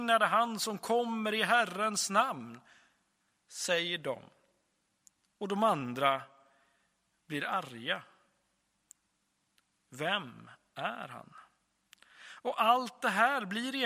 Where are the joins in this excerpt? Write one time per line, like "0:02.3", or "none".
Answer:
none